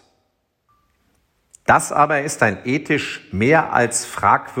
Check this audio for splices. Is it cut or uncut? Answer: uncut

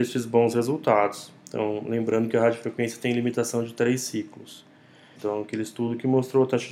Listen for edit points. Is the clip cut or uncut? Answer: cut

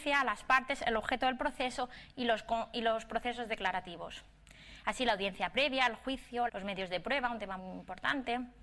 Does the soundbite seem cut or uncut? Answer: cut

